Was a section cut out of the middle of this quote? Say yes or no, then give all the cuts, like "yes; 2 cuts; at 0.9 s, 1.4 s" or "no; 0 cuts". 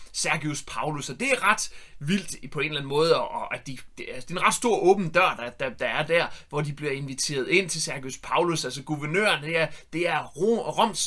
no; 0 cuts